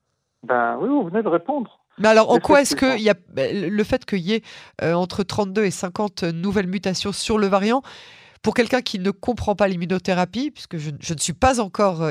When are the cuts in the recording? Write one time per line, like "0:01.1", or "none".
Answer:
0:01.9